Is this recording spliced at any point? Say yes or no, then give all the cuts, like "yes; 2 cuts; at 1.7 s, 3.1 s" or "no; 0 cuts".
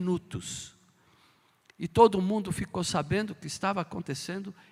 no; 0 cuts